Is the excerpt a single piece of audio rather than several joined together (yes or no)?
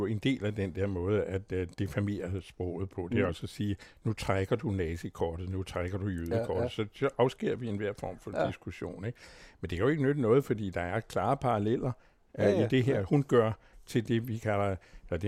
yes